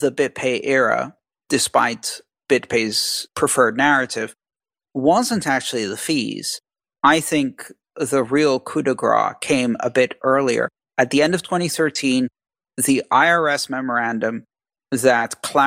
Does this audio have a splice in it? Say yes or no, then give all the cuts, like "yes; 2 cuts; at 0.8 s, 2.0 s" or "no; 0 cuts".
no; 0 cuts